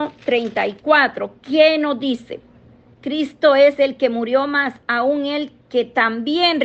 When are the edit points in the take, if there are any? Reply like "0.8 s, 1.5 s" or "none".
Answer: 2.9 s